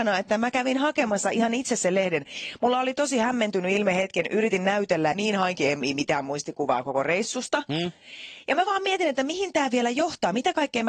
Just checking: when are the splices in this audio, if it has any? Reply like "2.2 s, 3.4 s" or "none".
5.1 s

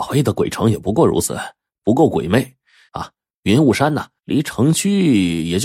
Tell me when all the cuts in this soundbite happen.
2.9 s, 4.2 s

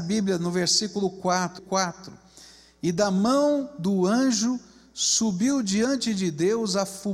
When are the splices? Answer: 1.6 s

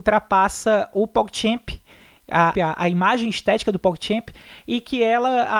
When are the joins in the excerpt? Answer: 2.5 s

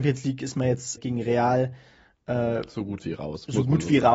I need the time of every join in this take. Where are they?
1.0 s

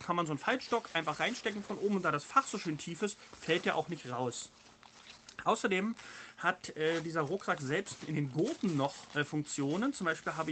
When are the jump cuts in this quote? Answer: none

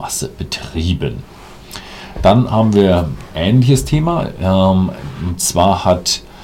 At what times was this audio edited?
none

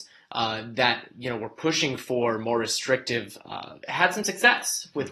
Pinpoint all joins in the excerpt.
3.8 s

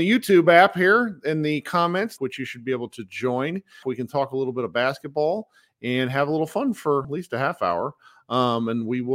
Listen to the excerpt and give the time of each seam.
2.2 s, 3.8 s, 7.0 s

